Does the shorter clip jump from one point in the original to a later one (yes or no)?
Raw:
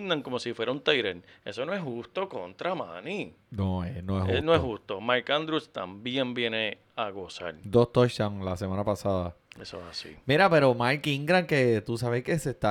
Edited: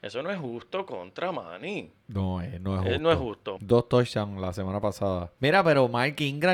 yes